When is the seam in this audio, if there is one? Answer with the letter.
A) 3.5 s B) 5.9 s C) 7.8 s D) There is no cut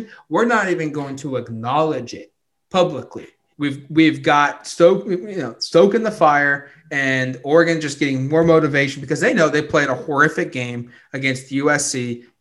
A